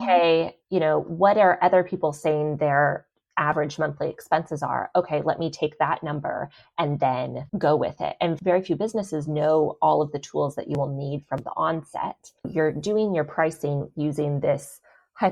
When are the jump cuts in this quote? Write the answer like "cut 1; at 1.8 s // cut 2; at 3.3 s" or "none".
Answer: cut 1; at 7.5 s // cut 2; at 12.4 s